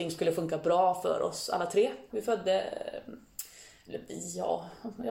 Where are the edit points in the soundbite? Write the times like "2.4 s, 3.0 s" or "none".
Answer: 2.1 s